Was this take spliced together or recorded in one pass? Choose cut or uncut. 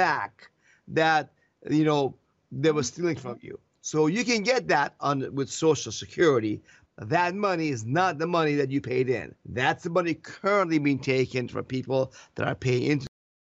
cut